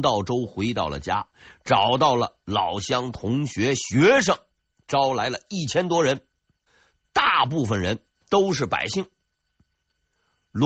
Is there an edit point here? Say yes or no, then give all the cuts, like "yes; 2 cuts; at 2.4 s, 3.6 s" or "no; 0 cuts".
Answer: no; 0 cuts